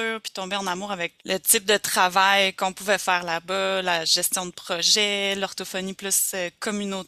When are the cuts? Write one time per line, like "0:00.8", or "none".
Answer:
0:01.2